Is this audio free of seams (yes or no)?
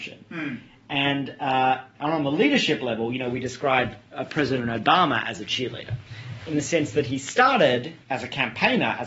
no